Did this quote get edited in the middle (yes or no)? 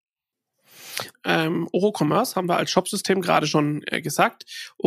yes